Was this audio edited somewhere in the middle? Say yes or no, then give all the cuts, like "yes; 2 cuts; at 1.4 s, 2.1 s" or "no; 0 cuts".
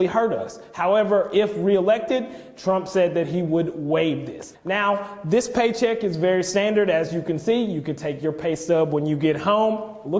yes; 1 cut; at 4.5 s